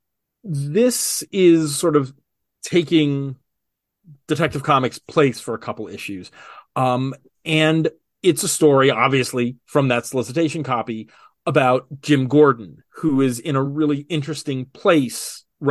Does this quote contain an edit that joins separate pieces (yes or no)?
no